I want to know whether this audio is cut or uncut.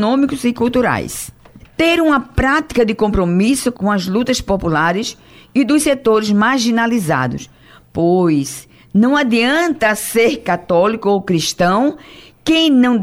cut